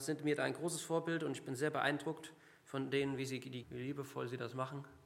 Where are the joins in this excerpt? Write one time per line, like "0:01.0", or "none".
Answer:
0:03.6